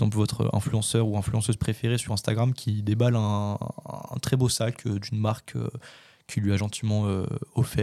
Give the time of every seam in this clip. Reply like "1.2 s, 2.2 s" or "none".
none